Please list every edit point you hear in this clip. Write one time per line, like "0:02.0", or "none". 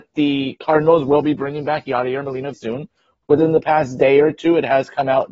0:02.5